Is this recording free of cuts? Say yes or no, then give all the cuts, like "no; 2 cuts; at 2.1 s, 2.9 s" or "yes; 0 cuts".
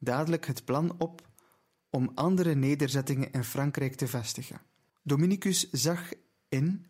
no; 1 cut; at 4.9 s